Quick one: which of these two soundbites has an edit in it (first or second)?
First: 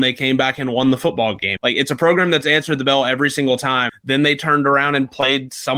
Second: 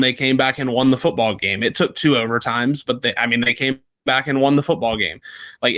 first